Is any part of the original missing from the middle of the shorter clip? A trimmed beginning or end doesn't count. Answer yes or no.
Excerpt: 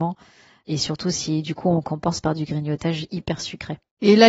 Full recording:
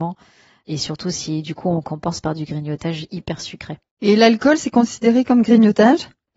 no